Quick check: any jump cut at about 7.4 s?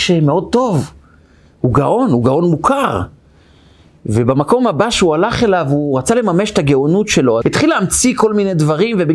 yes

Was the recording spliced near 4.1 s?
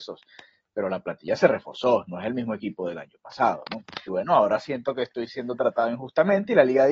yes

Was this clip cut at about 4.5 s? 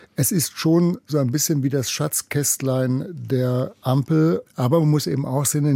yes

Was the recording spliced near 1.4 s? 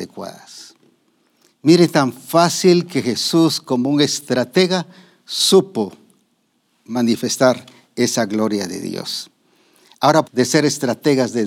no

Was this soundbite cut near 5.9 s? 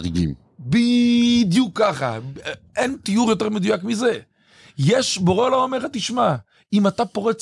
no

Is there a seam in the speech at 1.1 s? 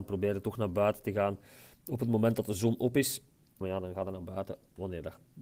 no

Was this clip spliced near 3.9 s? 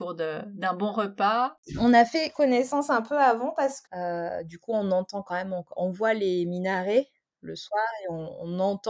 yes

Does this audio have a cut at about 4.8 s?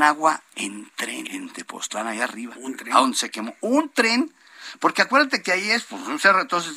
no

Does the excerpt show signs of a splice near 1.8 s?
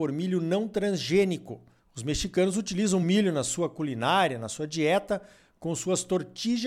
yes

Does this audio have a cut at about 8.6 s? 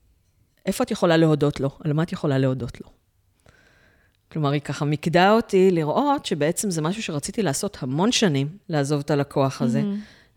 yes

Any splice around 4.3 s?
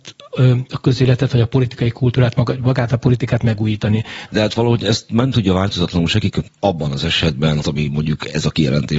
yes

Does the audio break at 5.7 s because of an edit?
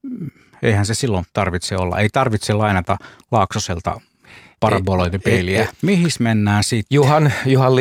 yes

